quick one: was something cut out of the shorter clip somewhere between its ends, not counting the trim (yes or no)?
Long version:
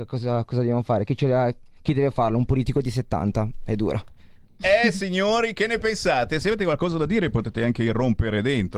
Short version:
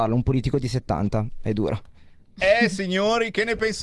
no